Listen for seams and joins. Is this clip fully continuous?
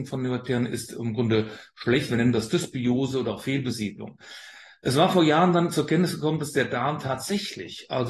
yes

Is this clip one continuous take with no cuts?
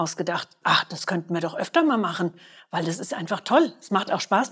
yes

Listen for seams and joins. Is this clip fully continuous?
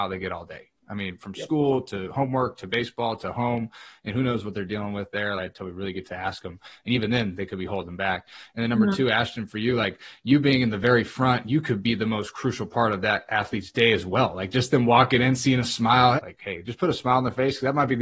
no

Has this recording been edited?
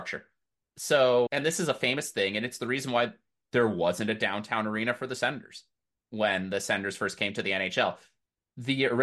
yes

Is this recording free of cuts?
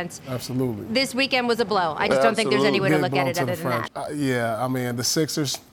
no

